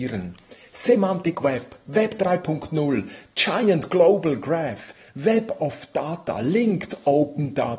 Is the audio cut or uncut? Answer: uncut